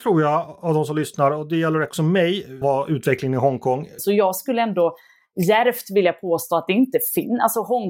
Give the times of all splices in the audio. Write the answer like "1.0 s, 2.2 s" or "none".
2.6 s, 4.0 s